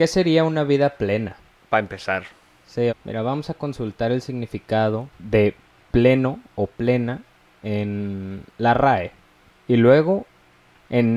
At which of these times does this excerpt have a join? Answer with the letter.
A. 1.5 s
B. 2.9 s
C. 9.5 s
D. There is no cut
B